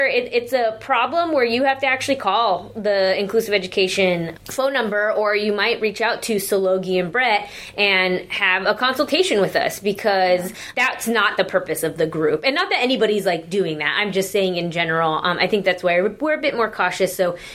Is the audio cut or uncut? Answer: uncut